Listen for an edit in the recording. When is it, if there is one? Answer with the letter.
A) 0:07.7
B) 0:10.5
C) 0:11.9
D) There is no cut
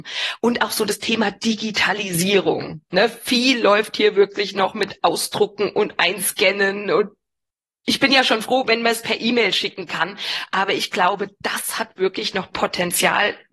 D